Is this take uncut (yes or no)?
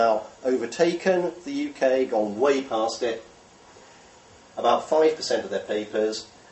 no